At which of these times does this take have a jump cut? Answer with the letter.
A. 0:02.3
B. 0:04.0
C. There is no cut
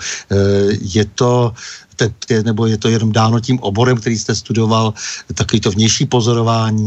A